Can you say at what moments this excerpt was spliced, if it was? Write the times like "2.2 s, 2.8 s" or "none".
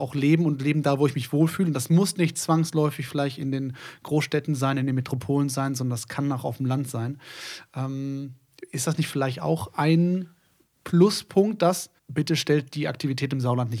12.0 s

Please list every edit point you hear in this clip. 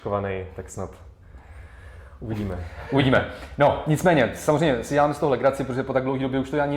none

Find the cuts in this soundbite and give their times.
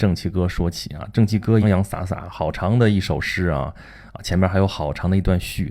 1.6 s

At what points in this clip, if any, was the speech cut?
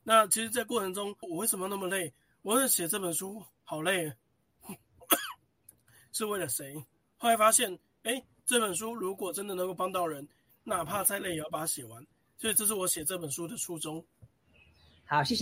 1.2 s

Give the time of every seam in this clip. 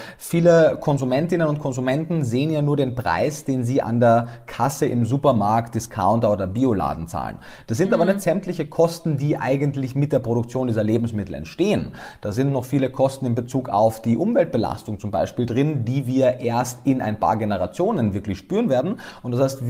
none

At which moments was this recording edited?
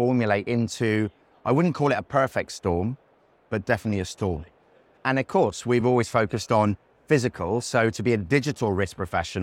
none

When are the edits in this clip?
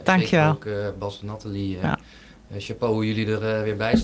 none

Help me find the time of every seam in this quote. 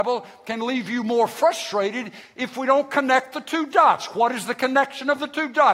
none

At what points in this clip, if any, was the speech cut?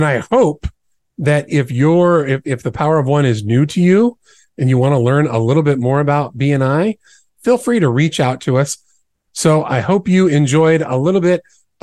9.3 s

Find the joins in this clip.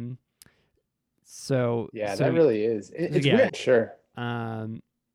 3.5 s

